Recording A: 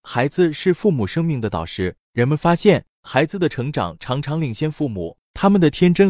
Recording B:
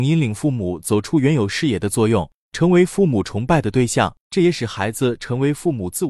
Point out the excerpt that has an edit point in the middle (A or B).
B